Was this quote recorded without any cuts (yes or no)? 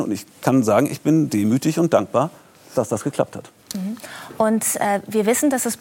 yes